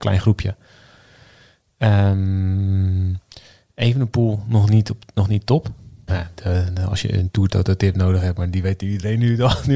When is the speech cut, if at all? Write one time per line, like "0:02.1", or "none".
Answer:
0:06.1